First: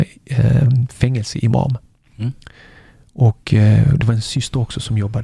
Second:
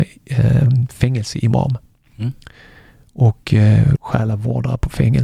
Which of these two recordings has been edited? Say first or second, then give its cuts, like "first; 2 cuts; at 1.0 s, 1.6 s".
second; 1 cut; at 4.0 s